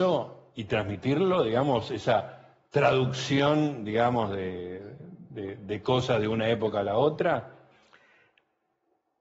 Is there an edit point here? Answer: no; 0 cuts

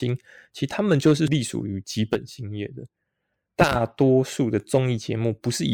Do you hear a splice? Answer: yes; 1 cut; at 3.5 s

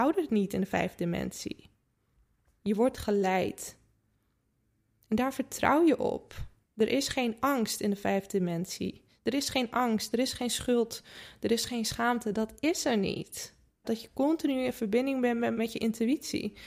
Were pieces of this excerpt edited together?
yes; 3 cuts; at 2.5 s, 13.8 s, 15.5 s

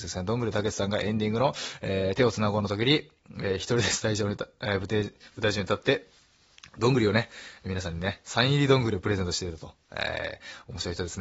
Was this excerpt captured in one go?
yes; 0 cuts

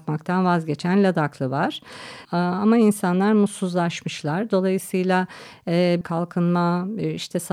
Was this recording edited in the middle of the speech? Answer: yes; 2 cuts; at 2.2 s, 6.0 s

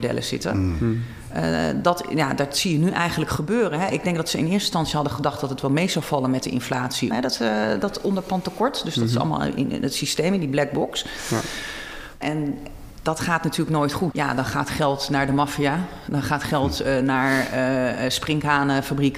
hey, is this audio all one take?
no; 3 cuts; at 7.1 s, 12.2 s, 14.1 s

